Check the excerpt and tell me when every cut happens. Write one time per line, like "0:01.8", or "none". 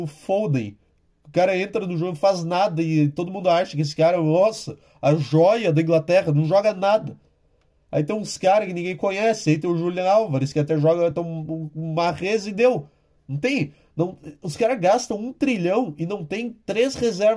none